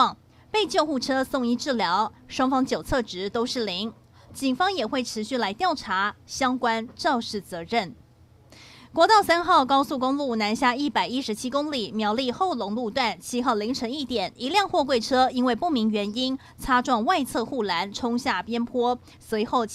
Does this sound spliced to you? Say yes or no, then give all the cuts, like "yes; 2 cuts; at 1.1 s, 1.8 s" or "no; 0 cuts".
no; 0 cuts